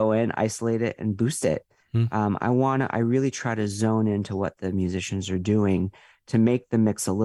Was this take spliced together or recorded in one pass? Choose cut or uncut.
uncut